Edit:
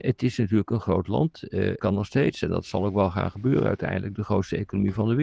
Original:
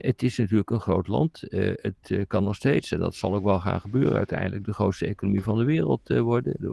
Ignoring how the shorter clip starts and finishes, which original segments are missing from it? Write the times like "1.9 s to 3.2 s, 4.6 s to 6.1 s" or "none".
1.8 s to 2.3 s